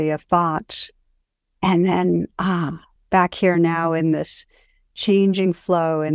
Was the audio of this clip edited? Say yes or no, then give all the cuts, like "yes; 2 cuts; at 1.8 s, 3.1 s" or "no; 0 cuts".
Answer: no; 0 cuts